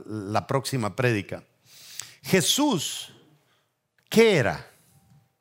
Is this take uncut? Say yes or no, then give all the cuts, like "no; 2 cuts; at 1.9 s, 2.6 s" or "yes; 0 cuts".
yes; 0 cuts